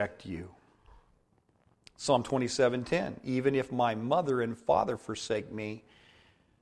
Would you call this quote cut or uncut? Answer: uncut